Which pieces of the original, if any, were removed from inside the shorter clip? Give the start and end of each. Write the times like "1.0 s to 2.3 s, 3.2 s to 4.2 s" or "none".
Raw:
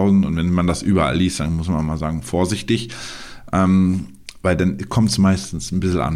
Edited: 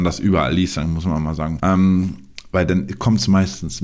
2.2 s to 3.5 s